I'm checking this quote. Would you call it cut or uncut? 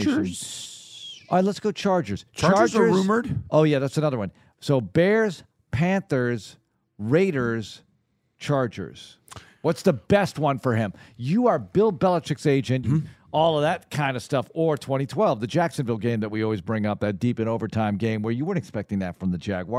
cut